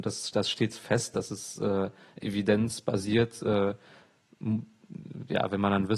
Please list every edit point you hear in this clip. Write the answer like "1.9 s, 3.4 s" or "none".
none